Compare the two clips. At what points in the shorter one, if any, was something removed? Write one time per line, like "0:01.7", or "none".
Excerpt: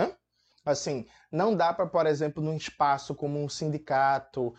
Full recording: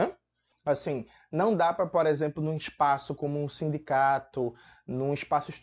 none